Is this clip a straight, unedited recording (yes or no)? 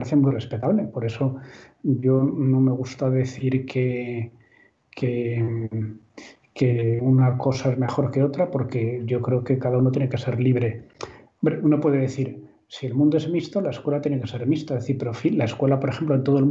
yes